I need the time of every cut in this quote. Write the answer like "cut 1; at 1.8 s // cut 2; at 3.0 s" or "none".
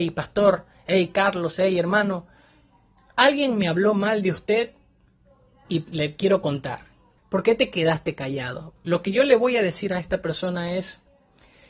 cut 1; at 7.2 s // cut 2; at 8.8 s

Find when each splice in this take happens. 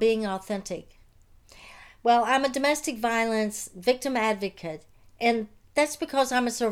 none

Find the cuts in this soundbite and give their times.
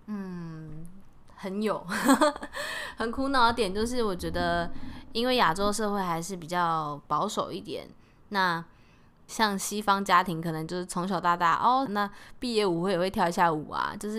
cut 1; at 9.3 s // cut 2; at 11.9 s

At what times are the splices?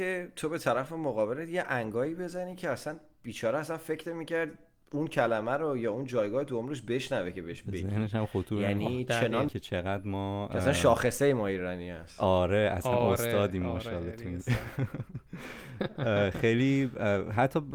cut 1; at 9.5 s

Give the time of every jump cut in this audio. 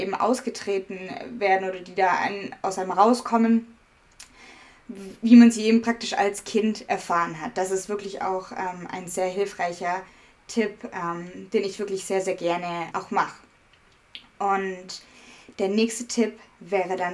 cut 1; at 12.9 s

